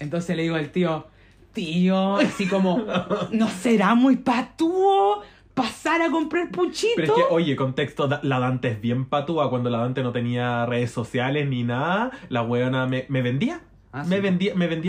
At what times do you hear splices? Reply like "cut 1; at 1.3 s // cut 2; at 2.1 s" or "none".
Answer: none

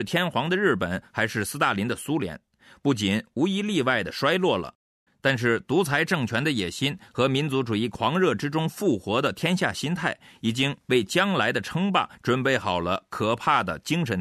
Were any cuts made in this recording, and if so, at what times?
cut 1; at 5.1 s

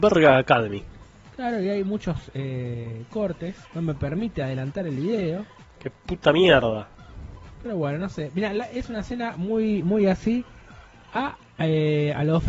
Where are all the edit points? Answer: cut 1; at 3.6 s

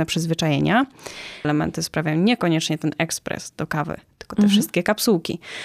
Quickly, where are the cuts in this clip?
cut 1; at 1.4 s

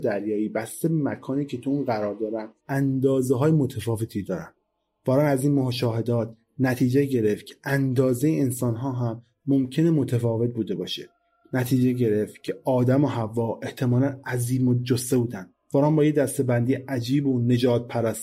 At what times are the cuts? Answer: cut 1; at 2.6 s

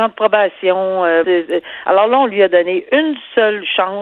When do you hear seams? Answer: cut 1; at 1.2 s

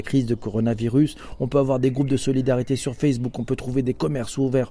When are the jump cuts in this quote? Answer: none

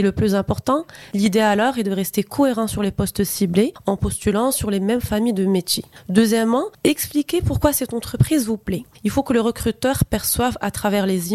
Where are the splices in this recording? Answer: cut 1; at 1.1 s

